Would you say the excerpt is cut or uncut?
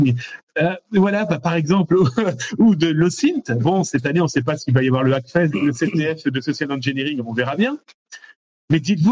cut